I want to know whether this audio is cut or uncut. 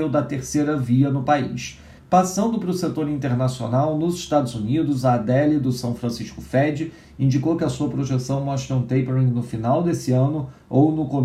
cut